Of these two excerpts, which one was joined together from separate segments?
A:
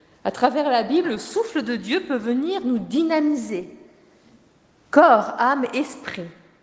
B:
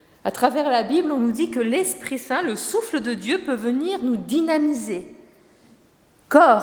A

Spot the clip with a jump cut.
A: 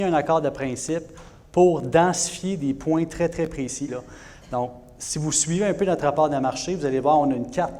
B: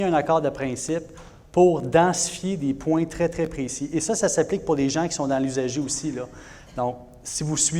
A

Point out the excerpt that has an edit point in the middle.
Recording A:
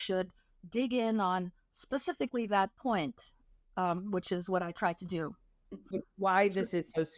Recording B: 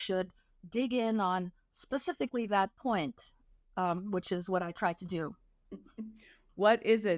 A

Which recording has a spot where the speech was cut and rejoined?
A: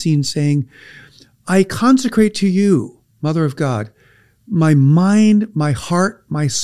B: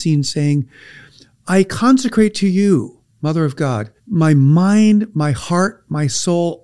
B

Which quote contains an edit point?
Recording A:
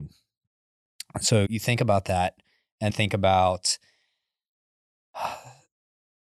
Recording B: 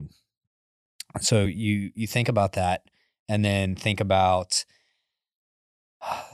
A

